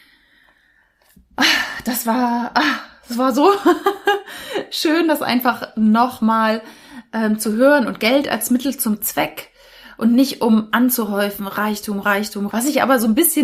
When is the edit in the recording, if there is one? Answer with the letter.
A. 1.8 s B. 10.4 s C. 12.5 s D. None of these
C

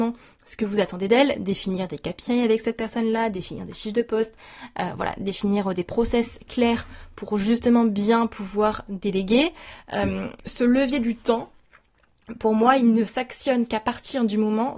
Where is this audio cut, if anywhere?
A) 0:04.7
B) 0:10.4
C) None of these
B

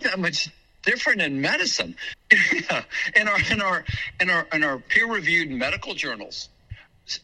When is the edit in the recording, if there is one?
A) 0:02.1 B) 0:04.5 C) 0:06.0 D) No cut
A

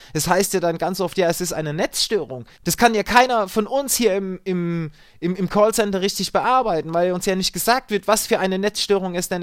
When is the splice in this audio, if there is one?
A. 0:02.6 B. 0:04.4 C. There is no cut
A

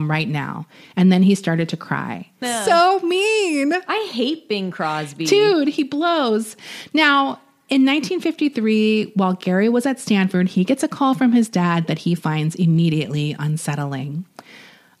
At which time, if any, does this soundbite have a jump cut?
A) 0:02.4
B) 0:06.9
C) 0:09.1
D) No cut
A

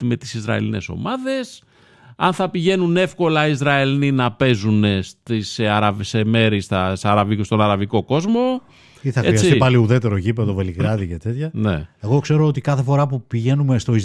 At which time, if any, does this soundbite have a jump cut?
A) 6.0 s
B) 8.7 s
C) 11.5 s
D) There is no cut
D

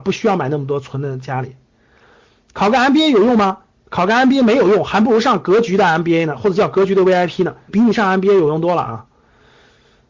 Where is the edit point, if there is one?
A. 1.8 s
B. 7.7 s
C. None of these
B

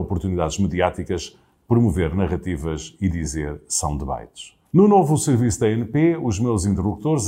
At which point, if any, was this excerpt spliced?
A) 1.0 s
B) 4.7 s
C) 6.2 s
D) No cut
B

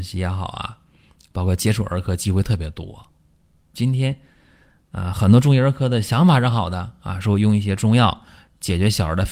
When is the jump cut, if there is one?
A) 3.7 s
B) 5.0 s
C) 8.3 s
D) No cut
A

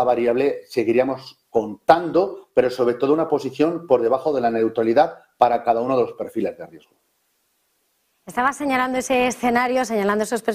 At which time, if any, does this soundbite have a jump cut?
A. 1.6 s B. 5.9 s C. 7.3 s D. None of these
D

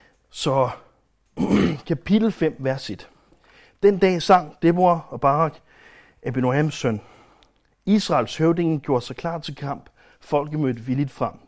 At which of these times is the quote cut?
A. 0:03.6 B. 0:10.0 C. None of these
C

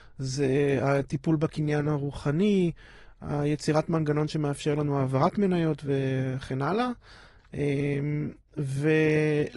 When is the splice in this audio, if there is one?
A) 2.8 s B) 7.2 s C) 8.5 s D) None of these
D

